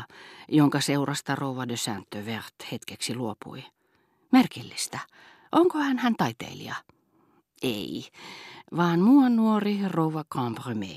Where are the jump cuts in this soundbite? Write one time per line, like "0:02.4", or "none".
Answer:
none